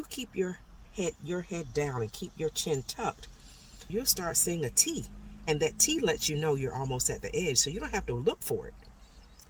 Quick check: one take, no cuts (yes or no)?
no